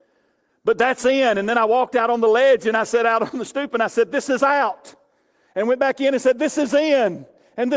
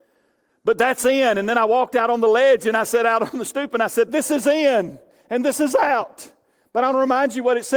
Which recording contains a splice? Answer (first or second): second